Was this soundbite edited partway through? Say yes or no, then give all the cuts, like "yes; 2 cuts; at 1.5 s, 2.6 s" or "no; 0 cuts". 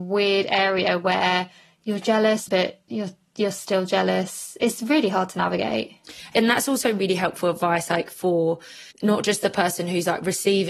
yes; 2 cuts; at 2.5 s, 8.9 s